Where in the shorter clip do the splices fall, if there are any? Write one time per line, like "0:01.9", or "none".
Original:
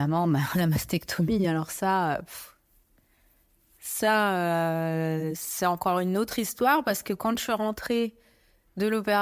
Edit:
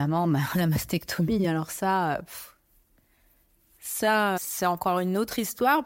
0:04.4